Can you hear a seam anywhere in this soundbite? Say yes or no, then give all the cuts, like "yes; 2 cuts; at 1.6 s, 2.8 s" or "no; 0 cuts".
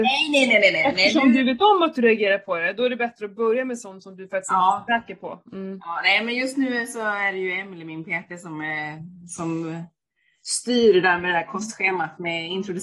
no; 0 cuts